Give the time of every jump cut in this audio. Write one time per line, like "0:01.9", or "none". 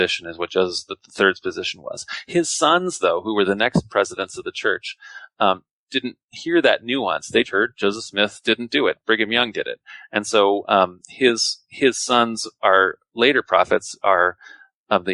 0:07.4